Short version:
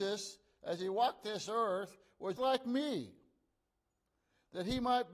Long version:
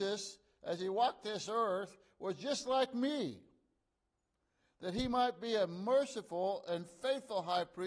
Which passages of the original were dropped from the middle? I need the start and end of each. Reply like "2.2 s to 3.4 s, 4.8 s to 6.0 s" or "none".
2.4 s to 2.6 s